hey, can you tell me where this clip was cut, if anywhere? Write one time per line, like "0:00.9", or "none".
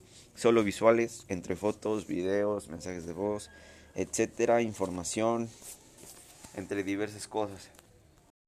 none